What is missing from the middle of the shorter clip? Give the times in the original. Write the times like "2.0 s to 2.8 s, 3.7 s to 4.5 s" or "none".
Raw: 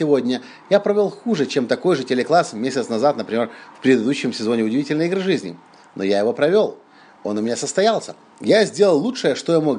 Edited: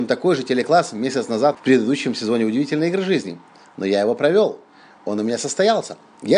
3.1 s to 3.7 s